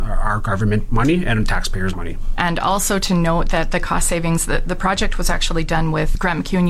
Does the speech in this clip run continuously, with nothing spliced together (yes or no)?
no